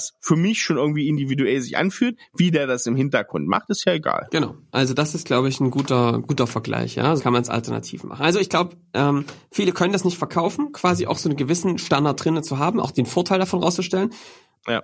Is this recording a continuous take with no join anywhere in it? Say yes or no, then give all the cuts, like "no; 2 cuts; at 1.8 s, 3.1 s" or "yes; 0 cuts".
no; 1 cut; at 7.2 s